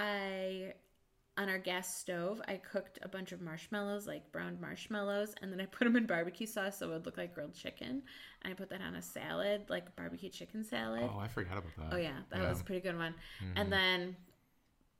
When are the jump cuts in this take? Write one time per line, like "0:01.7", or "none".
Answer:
none